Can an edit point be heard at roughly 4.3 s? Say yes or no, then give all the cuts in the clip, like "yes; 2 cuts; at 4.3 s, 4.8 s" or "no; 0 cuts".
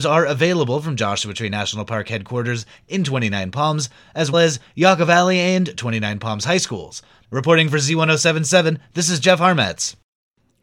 yes; 2 cuts; at 4.3 s, 7.2 s